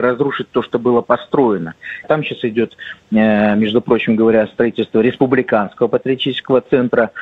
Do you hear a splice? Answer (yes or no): yes